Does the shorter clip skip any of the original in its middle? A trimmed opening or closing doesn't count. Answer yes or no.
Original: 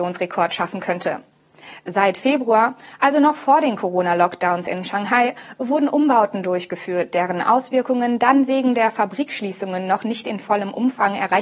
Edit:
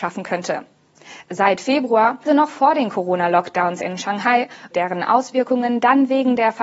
yes